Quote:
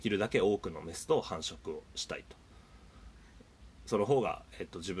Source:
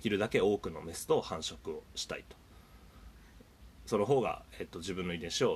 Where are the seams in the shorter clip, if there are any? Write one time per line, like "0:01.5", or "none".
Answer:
none